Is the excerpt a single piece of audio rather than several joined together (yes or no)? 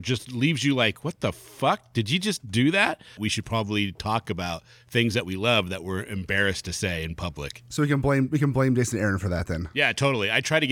no